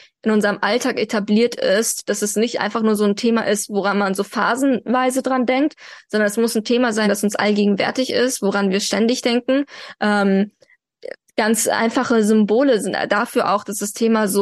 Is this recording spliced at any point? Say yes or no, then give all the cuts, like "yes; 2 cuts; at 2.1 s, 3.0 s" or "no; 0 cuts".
no; 0 cuts